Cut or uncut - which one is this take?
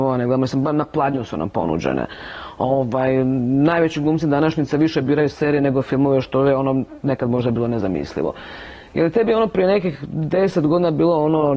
uncut